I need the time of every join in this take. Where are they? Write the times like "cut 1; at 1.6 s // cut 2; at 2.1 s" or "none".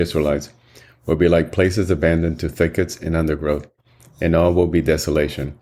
none